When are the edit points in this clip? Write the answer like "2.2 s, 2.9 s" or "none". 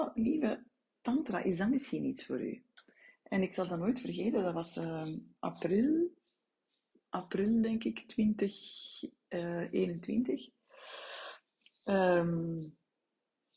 none